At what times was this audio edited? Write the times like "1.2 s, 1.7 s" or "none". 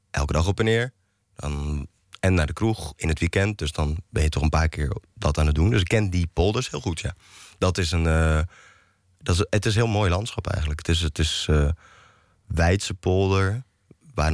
none